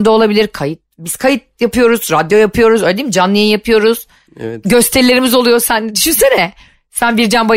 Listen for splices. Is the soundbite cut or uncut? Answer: uncut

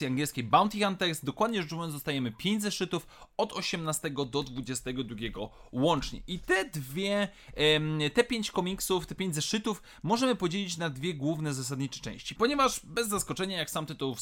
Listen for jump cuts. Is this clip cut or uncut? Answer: cut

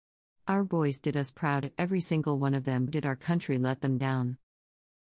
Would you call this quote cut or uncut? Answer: cut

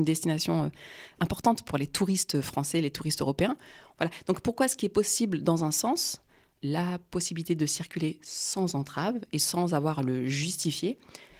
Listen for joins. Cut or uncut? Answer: cut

